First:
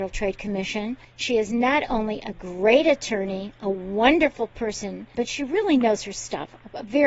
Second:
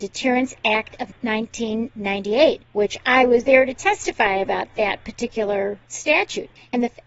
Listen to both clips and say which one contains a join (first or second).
first